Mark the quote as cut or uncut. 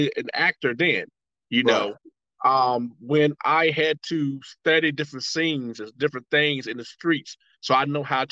uncut